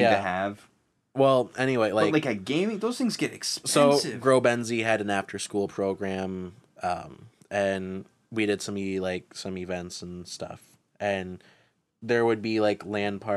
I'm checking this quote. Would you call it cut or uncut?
uncut